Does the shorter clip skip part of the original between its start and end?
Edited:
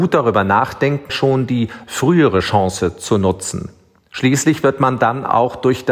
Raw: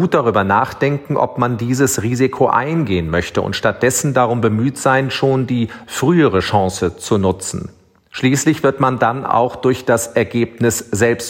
yes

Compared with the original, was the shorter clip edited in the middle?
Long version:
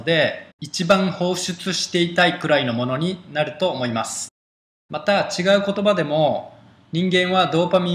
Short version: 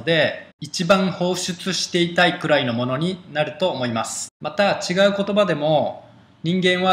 yes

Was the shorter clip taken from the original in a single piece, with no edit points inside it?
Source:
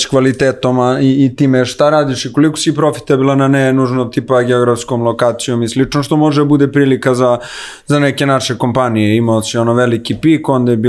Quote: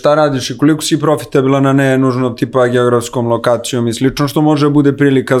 yes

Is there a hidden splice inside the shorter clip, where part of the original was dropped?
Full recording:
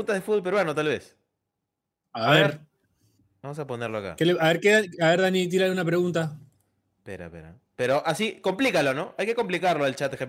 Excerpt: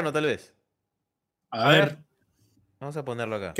no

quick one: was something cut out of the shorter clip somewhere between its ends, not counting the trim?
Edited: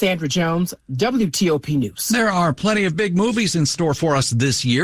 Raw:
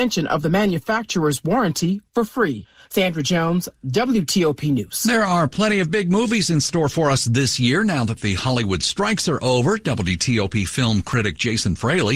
no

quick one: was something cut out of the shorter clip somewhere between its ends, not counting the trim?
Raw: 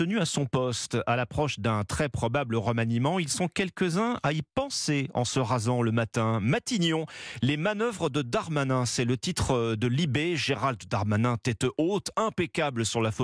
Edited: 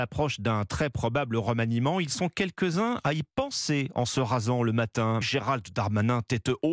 yes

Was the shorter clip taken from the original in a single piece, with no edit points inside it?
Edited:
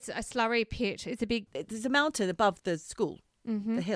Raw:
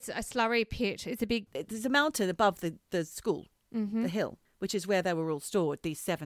no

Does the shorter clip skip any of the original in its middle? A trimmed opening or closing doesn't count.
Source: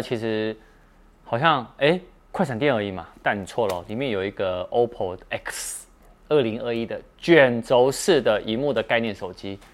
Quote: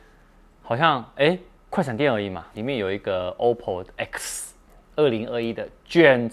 yes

